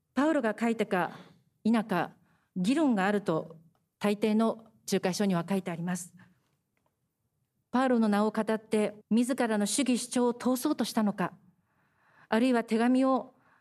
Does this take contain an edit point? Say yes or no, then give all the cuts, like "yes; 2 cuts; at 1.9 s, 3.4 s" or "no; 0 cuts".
yes; 2 cuts; at 7.6 s, 9.0 s